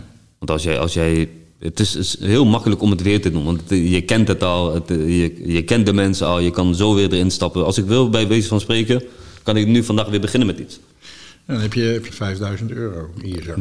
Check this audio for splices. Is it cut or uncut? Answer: cut